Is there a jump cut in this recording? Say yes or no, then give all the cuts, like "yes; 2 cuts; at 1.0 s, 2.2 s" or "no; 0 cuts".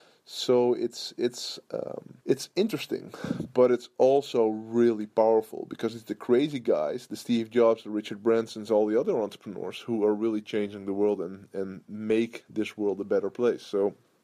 yes; 1 cut; at 2.2 s